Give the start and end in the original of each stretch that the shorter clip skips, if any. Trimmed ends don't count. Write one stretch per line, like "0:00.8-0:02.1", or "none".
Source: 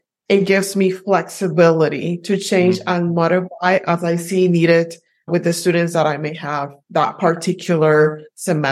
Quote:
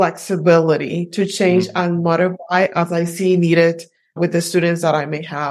none